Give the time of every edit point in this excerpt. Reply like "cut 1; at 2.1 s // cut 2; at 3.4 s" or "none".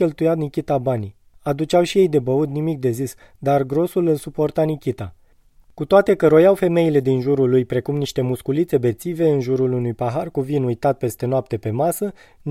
cut 1; at 1.3 s

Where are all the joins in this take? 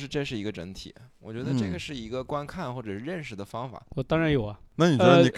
cut 1; at 3.9 s

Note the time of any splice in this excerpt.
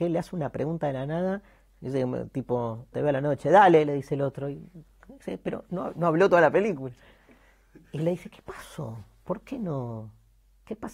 cut 1; at 2.9 s

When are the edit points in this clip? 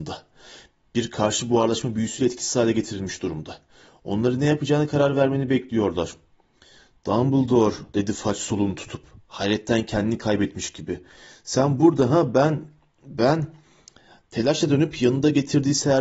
none

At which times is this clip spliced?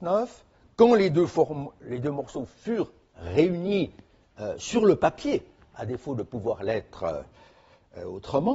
none

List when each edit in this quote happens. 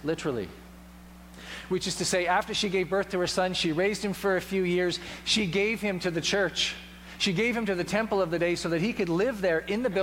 none

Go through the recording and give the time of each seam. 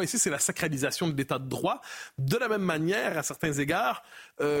none

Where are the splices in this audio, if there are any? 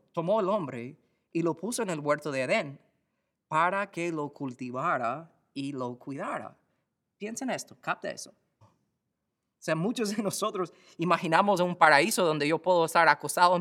cut 1; at 8.6 s

